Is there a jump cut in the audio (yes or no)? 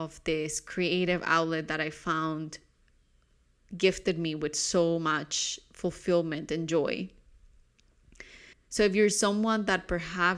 yes